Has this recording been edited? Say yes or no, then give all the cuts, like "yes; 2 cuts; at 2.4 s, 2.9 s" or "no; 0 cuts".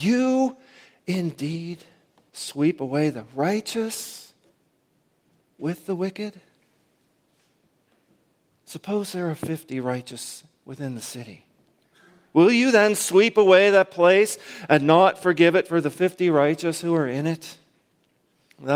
no; 0 cuts